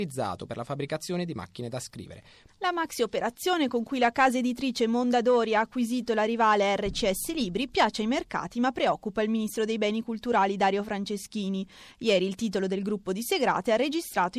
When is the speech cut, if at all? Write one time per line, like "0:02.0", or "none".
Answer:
0:02.5